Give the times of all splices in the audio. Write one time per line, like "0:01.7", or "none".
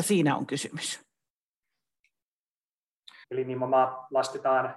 0:03.2